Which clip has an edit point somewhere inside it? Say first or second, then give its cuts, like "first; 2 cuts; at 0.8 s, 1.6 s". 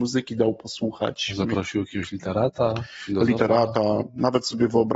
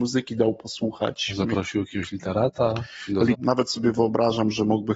second; 1 cut; at 3.3 s